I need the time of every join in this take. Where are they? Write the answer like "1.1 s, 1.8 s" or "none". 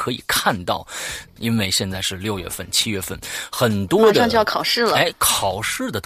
1.4 s